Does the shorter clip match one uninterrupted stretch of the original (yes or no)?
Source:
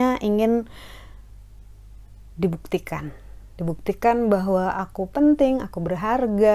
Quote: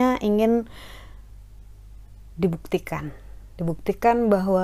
yes